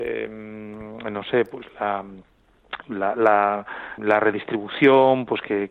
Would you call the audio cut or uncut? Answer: cut